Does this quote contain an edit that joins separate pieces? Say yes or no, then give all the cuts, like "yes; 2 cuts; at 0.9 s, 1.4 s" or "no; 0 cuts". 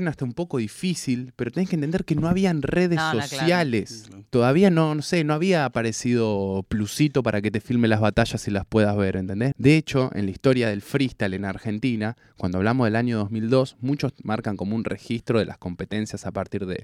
yes; 1 cut; at 9.5 s